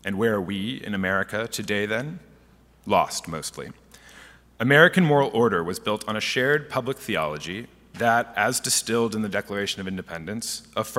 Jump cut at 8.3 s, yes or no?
no